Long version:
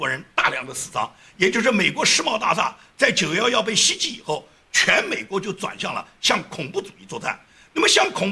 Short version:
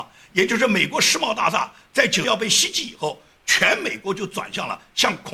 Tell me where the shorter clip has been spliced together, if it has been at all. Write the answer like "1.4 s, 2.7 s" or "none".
2.2 s